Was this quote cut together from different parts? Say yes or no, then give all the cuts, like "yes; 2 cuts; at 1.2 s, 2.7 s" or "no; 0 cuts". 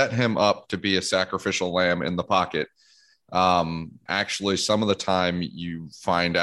yes; 1 cut; at 4.1 s